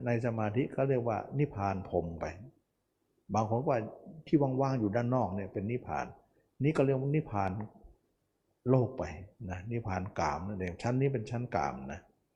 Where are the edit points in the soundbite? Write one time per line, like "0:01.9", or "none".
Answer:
none